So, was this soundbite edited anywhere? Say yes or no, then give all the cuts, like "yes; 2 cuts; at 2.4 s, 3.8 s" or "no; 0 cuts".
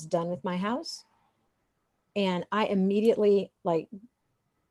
no; 0 cuts